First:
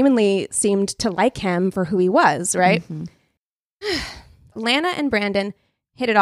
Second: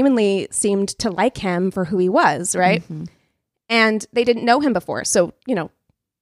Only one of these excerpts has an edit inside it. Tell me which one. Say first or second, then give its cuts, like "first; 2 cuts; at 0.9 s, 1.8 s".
first; 2 cuts; at 3.4 s, 4.5 s